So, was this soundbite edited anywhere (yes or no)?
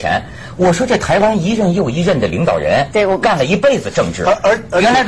no